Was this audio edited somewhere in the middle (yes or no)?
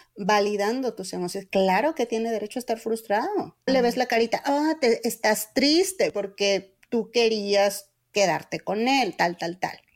yes